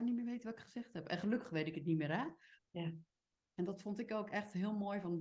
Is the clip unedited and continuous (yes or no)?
no